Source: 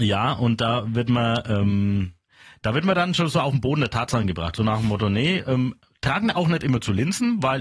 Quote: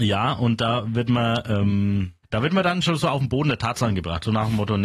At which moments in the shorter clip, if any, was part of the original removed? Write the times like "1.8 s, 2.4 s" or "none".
2.2 s